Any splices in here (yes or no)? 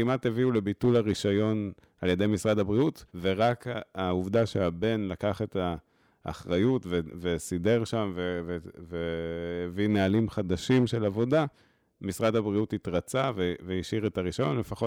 yes